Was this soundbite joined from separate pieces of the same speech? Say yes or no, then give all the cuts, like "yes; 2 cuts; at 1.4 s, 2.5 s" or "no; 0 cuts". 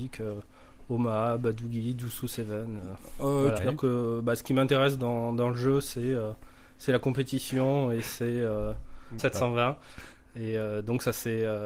yes; 2 cuts; at 3.6 s, 9.2 s